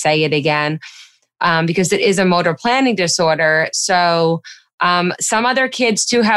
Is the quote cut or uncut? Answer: uncut